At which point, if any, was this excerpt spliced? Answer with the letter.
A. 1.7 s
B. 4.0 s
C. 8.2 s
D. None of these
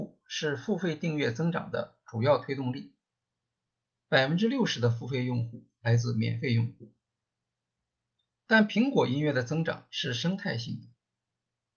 D